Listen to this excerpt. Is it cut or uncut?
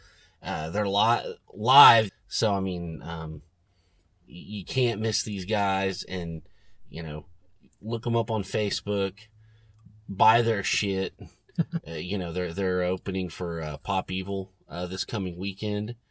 cut